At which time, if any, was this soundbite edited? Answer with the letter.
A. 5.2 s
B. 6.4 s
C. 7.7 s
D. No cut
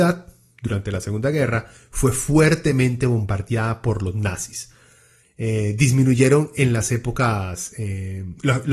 A